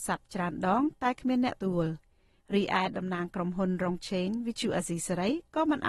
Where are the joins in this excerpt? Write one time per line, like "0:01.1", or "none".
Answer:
0:01.6